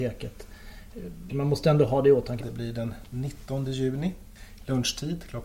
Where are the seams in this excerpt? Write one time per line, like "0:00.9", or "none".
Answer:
0:01.3
0:02.4